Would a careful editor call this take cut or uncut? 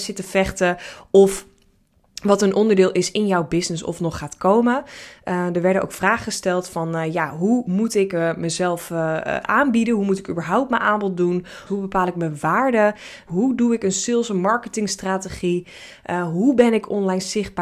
cut